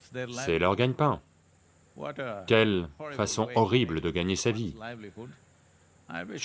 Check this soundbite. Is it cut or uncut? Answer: uncut